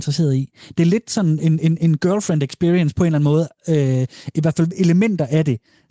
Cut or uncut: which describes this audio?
uncut